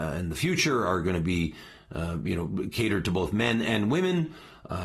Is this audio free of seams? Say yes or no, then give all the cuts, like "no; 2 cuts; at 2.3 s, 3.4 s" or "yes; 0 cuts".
yes; 0 cuts